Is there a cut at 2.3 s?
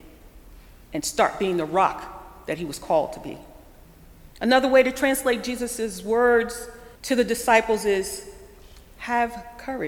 no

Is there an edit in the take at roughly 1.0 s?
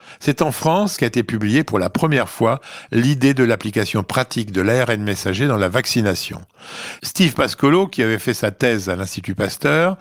yes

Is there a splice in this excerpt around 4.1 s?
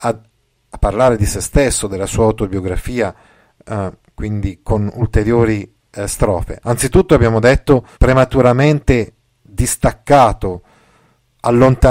no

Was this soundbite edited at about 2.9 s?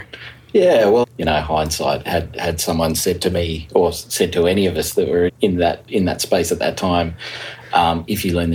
no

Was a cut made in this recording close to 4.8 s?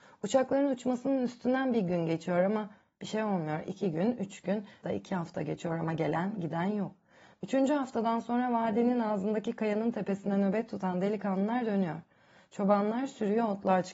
yes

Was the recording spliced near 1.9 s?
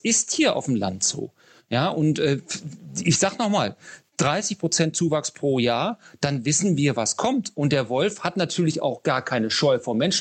no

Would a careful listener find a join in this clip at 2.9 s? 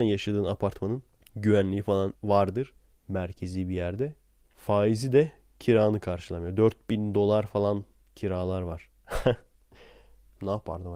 yes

